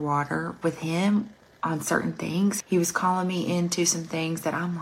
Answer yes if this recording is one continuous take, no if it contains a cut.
no